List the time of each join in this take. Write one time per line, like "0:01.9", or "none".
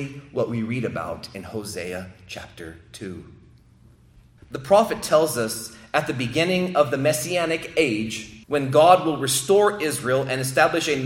0:04.4
0:08.4